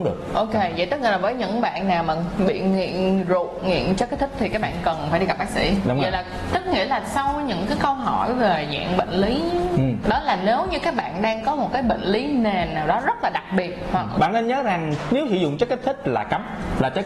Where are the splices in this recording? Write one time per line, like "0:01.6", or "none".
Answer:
0:10.0
0:14.1